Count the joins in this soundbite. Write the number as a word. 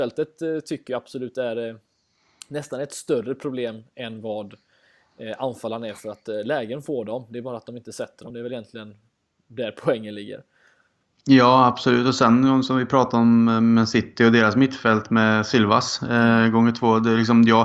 zero